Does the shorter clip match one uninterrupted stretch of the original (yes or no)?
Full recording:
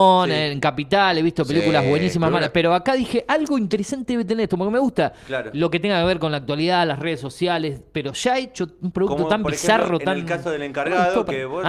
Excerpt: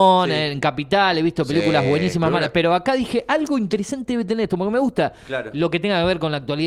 yes